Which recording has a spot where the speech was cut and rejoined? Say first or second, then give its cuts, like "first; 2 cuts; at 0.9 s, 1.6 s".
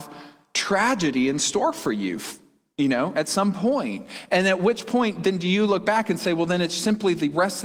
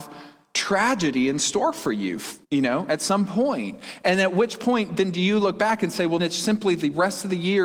second; 2 cuts; at 2.4 s, 6.2 s